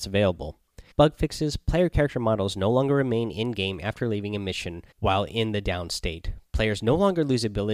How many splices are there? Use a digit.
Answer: 2